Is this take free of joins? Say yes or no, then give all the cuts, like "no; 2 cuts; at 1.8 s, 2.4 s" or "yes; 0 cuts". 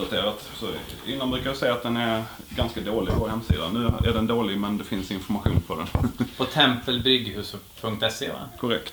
yes; 0 cuts